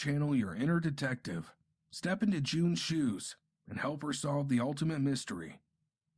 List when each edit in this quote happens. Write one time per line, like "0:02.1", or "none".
0:01.8